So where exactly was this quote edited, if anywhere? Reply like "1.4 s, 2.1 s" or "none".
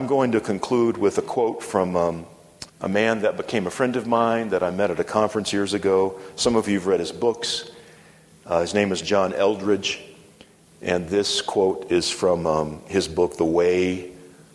2.7 s